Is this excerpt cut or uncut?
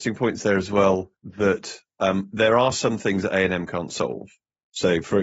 cut